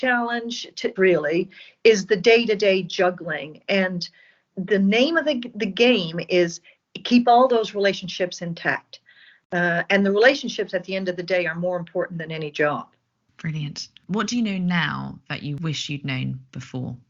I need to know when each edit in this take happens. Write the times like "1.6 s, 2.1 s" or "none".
1.0 s, 4.5 s